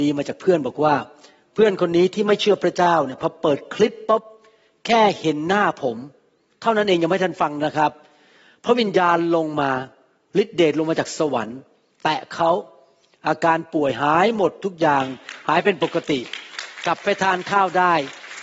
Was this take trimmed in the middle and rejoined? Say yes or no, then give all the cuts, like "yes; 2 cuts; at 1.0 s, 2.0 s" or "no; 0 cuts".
no; 0 cuts